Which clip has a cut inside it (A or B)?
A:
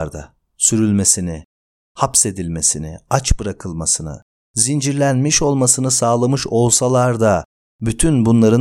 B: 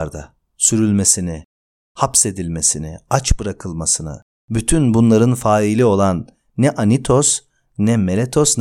B